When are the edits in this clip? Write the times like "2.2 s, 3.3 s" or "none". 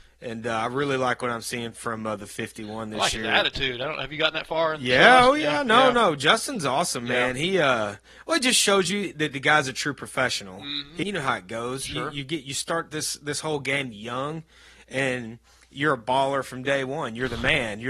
11.0 s